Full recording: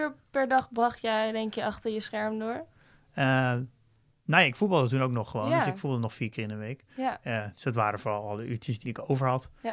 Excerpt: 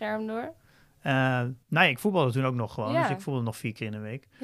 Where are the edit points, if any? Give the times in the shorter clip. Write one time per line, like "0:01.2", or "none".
0:01.6